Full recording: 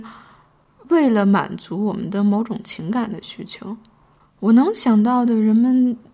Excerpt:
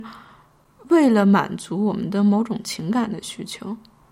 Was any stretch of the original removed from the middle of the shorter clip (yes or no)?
no